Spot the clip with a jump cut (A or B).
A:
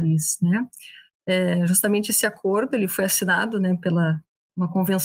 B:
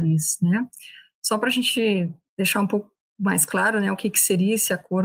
A